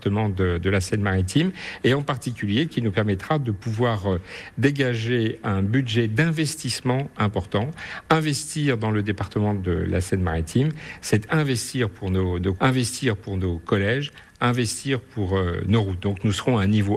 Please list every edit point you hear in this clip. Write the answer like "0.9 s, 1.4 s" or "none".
12.6 s